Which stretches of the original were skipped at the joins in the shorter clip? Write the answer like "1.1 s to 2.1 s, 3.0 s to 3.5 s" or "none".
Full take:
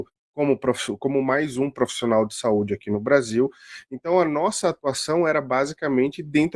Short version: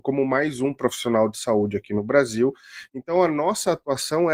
none